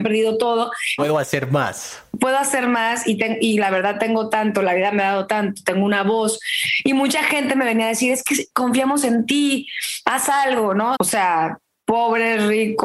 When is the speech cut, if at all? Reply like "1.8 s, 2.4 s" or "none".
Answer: 1.0 s, 11.0 s